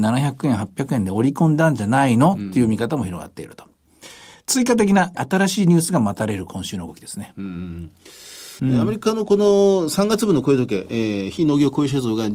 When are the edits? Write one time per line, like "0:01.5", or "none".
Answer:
0:05.1
0:08.6